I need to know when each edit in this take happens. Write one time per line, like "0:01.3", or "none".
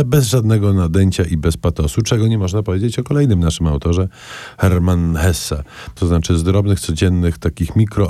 0:06.0